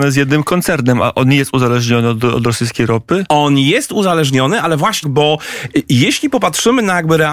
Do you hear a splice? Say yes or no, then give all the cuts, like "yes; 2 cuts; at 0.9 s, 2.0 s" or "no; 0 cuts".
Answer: yes; 1 cut; at 5.0 s